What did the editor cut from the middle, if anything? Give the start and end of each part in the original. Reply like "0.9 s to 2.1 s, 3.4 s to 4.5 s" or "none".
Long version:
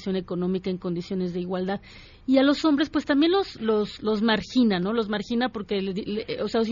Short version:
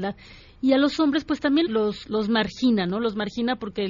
3.3 s to 3.6 s